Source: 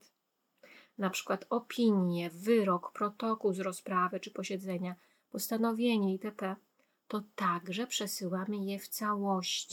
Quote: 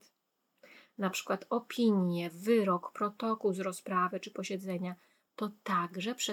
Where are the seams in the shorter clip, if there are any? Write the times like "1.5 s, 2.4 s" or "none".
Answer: 5.3 s